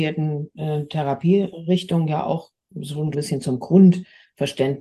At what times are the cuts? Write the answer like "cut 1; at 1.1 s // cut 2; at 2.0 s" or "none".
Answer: cut 1; at 3.1 s